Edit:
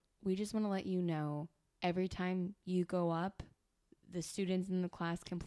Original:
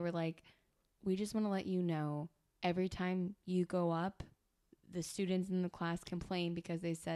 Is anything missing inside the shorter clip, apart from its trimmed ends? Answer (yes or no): no